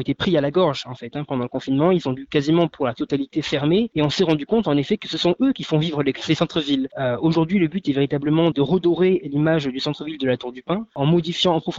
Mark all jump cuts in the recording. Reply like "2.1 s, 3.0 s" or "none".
6.9 s, 8.5 s

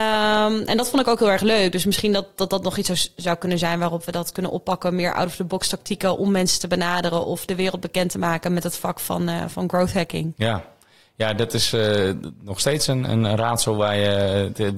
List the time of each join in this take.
none

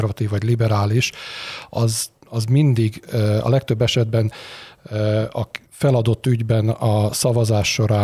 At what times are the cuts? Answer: 5.7 s

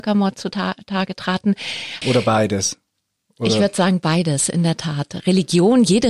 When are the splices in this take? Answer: 2.0 s

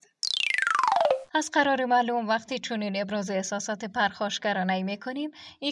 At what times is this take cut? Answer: 1.3 s

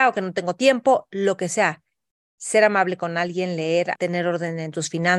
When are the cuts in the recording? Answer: 3.9 s

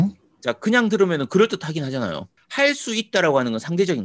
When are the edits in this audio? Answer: 2.4 s

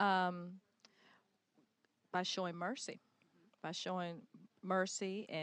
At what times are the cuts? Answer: none

